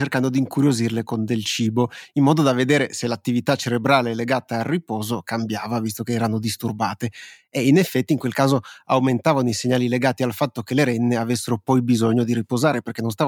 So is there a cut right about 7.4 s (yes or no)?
no